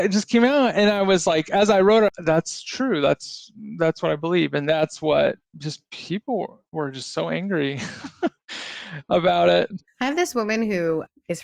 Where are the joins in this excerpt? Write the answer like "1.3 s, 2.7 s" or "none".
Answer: 2.1 s